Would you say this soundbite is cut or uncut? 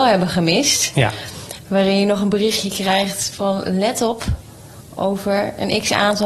uncut